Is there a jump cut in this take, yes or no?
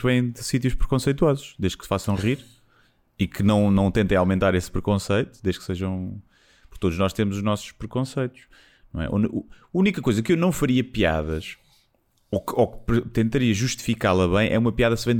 no